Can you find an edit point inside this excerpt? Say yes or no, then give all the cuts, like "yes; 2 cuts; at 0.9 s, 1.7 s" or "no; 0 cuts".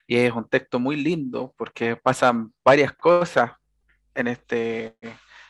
no; 0 cuts